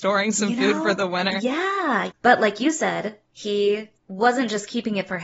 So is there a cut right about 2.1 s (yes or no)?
yes